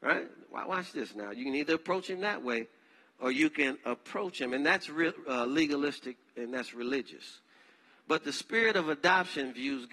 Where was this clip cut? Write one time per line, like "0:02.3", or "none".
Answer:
none